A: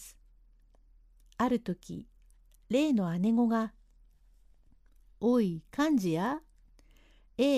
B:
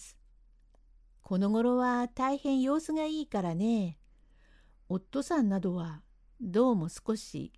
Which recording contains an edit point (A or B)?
B